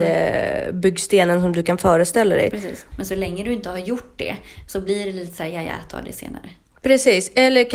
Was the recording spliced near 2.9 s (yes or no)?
yes